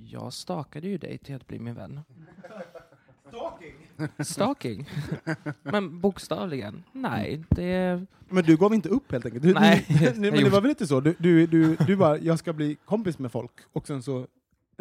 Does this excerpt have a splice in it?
no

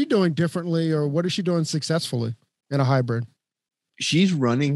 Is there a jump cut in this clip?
no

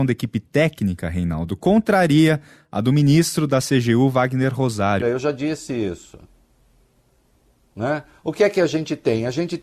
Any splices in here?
yes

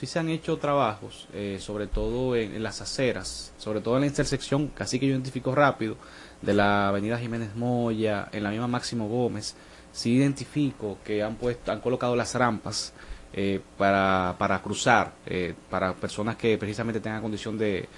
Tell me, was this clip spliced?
no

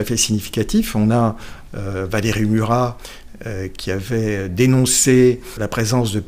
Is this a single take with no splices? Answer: no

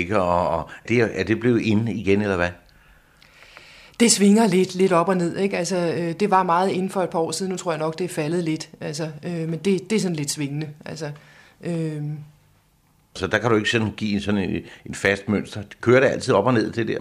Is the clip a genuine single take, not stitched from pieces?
yes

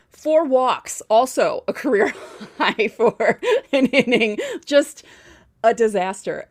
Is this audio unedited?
yes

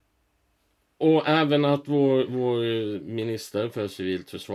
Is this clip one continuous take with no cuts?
yes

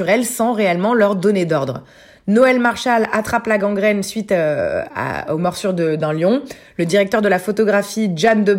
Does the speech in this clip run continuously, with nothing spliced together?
yes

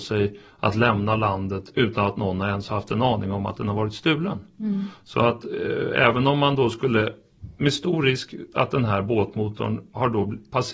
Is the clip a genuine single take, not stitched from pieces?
yes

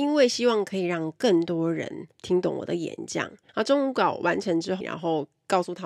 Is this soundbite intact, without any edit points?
no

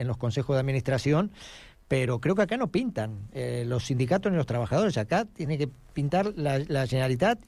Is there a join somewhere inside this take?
no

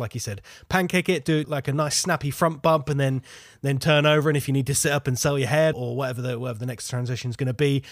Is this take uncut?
no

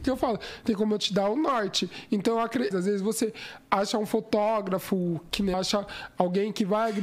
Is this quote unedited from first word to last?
no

